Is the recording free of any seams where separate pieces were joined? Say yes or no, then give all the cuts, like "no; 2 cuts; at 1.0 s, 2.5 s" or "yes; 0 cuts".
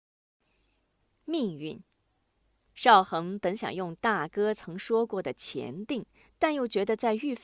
yes; 0 cuts